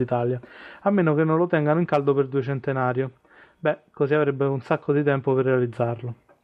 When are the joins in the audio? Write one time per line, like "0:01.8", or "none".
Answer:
none

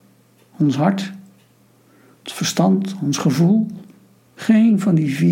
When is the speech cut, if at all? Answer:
0:04.2

